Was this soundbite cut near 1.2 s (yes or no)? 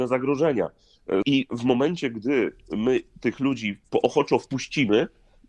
yes